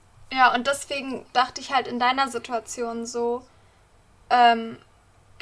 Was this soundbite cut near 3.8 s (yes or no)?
no